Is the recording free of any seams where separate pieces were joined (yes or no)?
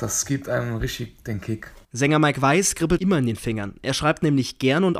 no